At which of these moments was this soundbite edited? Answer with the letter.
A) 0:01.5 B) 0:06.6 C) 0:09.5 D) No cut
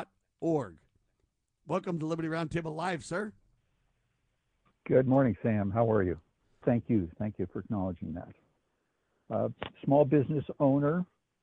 B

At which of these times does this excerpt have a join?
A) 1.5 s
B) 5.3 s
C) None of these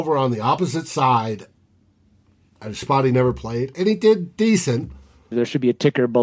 B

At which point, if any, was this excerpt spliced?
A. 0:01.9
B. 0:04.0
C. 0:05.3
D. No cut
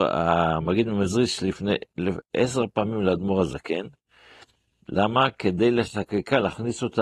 D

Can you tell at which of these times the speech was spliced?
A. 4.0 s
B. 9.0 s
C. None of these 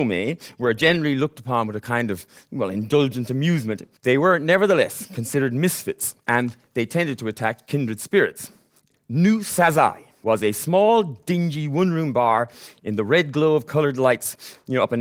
A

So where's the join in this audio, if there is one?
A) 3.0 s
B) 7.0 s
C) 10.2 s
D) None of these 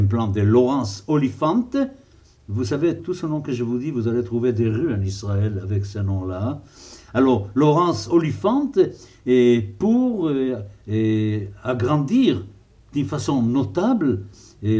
A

